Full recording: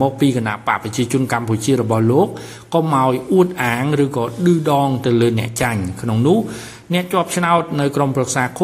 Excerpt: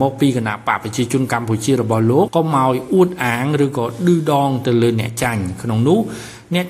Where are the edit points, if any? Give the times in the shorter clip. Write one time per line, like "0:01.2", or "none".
0:02.3